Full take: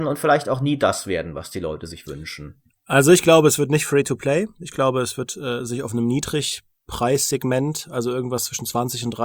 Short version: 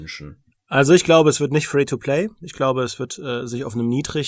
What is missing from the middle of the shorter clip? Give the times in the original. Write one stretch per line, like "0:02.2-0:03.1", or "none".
none